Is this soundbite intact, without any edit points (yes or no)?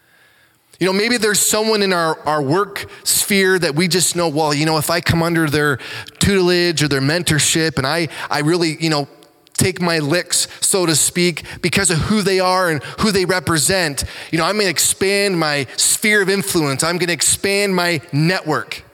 yes